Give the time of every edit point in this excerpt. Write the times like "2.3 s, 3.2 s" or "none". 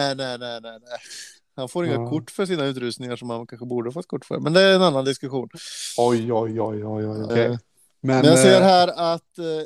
7.3 s